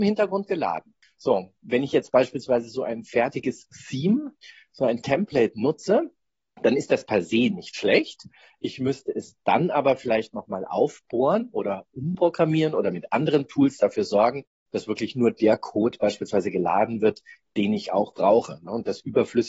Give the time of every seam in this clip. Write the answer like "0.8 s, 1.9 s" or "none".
none